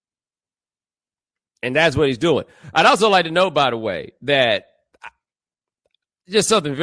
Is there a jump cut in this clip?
no; 0 cuts

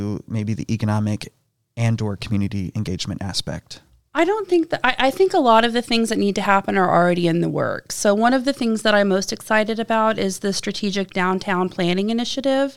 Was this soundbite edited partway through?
no; 0 cuts

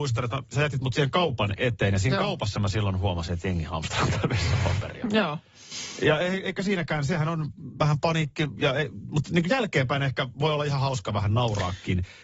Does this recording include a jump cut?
no; 0 cuts

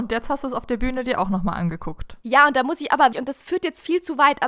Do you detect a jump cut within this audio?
yes; 1 cut; at 3.1 s

